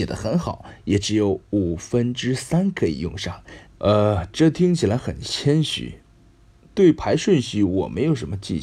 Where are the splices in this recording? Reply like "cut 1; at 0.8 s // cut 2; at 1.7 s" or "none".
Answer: cut 1; at 3.7 s